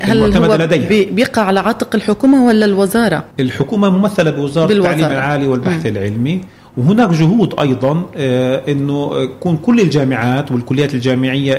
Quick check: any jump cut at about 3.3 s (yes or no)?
yes